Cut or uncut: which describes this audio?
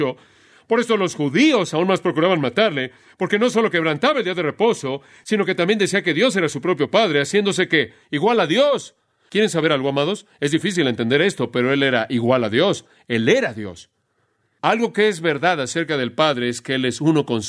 uncut